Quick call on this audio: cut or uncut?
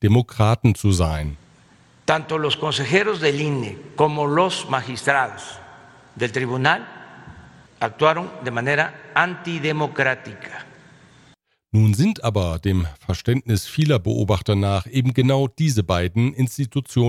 uncut